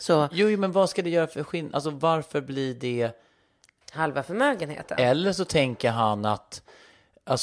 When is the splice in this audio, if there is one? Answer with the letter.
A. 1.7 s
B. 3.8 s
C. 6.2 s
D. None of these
B